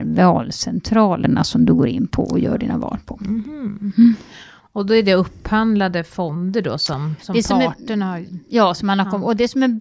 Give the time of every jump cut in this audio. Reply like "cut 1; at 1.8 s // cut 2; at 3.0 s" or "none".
cut 1; at 7.2 s